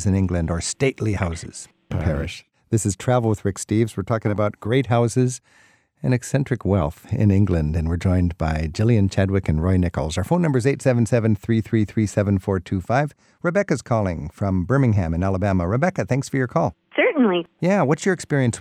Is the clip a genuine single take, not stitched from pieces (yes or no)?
no